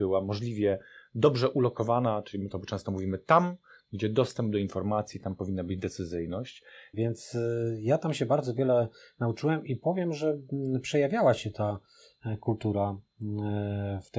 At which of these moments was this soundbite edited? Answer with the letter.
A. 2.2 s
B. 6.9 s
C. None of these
B